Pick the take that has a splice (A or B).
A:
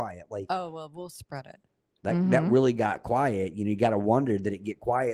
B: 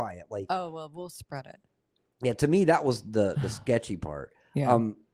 A